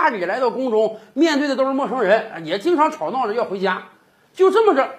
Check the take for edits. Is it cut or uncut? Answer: uncut